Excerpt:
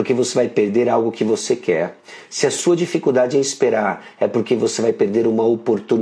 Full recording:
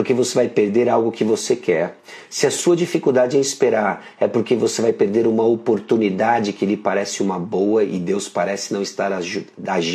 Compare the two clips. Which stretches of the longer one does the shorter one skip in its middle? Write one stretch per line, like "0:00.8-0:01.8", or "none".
none